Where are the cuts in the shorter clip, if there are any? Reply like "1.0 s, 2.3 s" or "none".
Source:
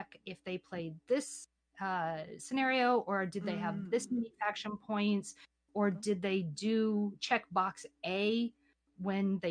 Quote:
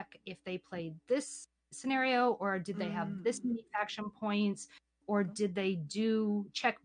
1.7 s